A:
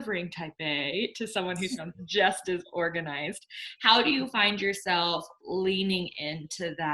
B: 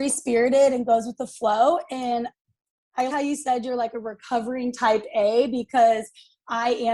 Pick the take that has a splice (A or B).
B